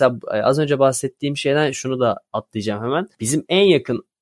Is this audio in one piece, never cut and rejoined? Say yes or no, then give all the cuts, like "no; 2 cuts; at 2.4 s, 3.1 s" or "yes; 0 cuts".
no; 1 cut; at 1.7 s